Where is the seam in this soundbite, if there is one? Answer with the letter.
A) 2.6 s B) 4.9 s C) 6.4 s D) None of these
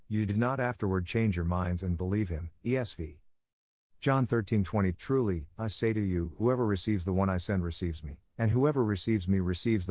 B